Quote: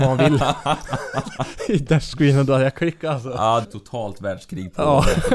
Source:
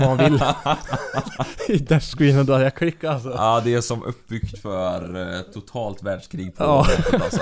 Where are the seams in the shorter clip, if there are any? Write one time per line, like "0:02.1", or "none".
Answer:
0:03.6